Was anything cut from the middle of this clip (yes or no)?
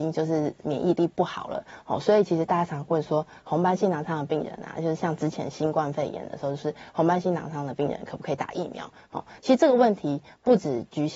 no